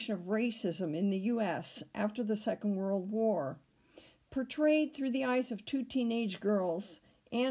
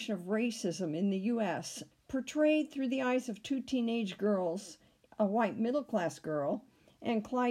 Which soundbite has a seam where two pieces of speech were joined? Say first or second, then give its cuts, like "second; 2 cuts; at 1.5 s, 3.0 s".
second; 2 cuts; at 1.9 s, 5.1 s